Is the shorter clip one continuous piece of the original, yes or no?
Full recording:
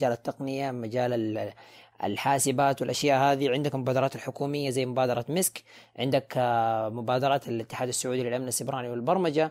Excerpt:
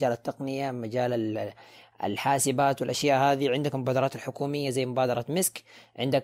yes